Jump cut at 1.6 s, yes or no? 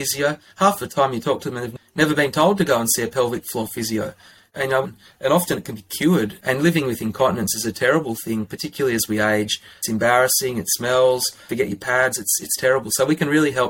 no